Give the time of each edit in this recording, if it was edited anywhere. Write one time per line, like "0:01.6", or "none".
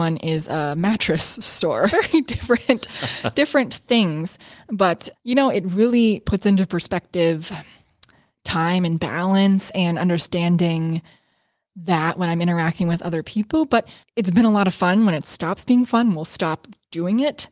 0:01.9